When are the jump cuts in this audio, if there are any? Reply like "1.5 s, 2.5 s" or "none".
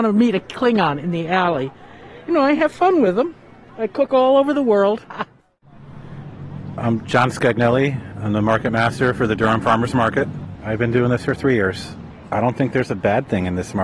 5.0 s